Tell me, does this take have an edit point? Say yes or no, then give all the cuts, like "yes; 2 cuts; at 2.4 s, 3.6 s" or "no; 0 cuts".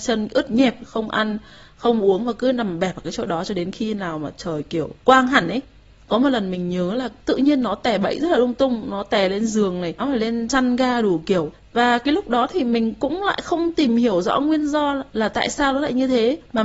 yes; 1 cut; at 10.0 s